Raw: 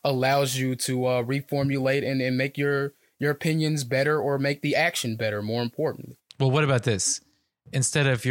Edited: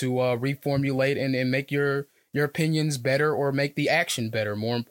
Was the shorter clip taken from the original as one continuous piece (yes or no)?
yes